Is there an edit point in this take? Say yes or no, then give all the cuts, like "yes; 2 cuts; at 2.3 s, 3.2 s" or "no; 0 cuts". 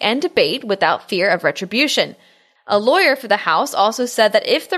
yes; 1 cut; at 2.6 s